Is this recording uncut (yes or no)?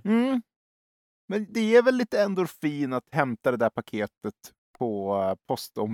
yes